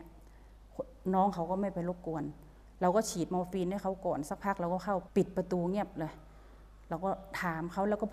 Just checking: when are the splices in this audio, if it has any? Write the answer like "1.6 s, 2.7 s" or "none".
5.0 s